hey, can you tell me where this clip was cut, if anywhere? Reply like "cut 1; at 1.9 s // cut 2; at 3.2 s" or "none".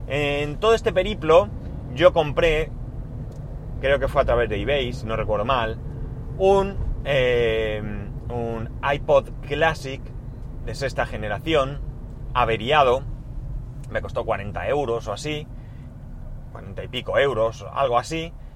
cut 1; at 3.8 s